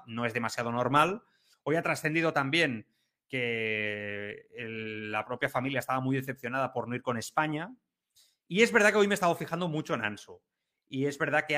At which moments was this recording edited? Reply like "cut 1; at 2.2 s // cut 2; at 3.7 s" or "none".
cut 1; at 1.5 s